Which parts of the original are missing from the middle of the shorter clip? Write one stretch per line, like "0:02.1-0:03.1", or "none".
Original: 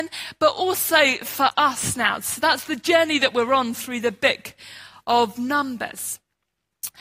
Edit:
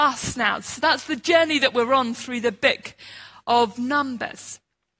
none